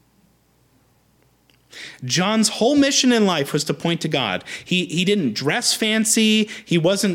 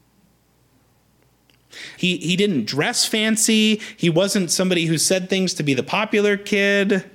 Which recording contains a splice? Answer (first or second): second